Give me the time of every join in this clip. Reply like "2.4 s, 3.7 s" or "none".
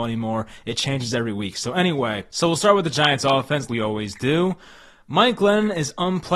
3.7 s